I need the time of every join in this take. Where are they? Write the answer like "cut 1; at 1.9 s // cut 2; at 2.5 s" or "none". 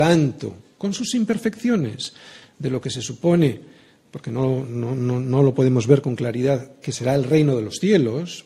none